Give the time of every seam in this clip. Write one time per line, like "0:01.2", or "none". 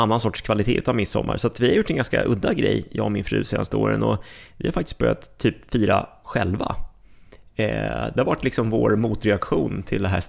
none